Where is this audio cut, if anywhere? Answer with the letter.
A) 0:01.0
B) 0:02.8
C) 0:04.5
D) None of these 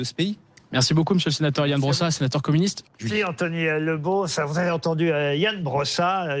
B